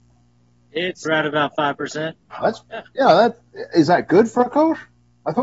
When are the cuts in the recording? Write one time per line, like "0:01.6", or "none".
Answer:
0:01.1
0:02.3